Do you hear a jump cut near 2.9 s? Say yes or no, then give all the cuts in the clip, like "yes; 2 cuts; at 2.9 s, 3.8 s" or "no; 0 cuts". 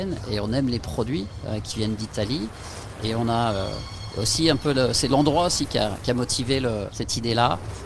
no; 1 cut; at 6.9 s